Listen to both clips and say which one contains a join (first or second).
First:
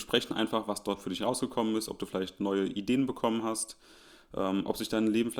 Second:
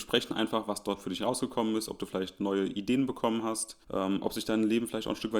second